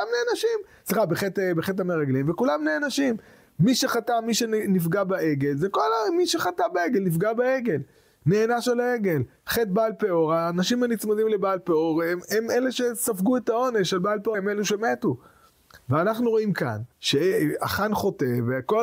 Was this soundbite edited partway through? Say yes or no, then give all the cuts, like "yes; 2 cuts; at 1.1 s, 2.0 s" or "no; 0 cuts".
yes; 2 cuts; at 14.3 s, 16.9 s